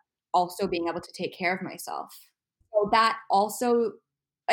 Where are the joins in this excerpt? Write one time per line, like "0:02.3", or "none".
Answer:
0:02.6